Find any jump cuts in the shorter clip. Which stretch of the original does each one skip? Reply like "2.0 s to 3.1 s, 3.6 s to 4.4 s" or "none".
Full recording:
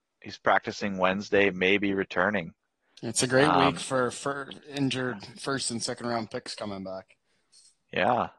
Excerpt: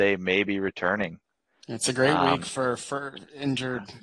none